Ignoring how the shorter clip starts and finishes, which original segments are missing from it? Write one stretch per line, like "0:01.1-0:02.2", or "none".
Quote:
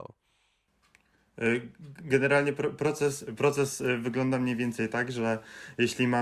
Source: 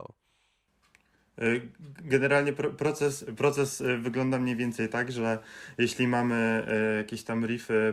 none